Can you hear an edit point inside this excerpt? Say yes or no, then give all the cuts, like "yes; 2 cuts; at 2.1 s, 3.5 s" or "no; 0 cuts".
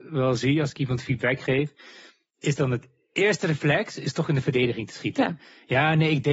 no; 0 cuts